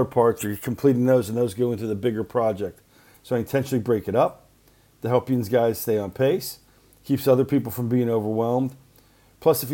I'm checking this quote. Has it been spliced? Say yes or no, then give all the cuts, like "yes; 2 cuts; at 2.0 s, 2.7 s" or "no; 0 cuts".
no; 0 cuts